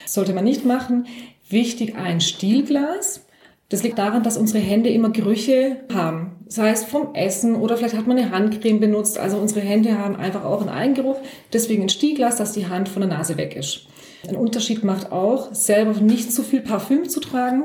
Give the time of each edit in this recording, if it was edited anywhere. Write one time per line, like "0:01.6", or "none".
0:03.9

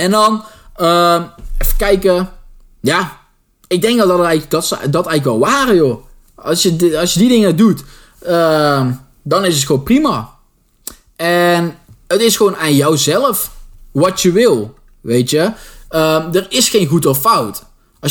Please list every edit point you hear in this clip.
none

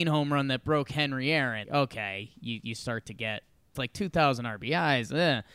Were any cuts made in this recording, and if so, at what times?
0:01.6
0:03.7

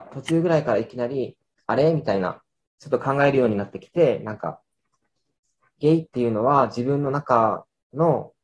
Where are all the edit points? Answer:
0:02.7

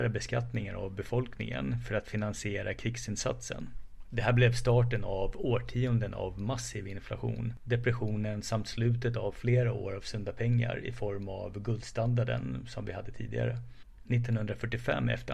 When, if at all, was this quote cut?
0:07.6

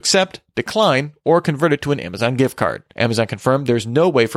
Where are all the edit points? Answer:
0:02.9

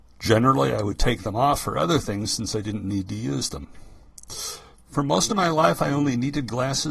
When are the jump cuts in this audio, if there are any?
0:04.7

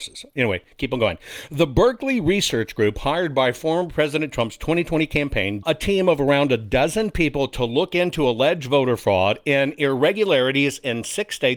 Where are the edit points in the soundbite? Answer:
0:05.6

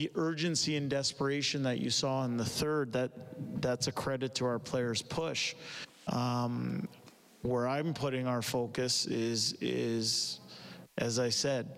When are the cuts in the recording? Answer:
none

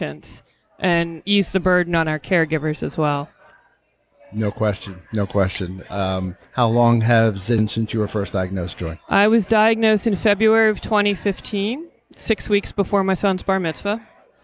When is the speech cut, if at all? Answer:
none

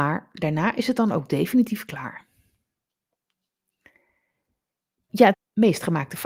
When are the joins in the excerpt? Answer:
0:05.3

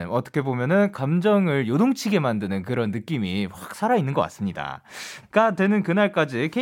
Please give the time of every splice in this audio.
0:05.2

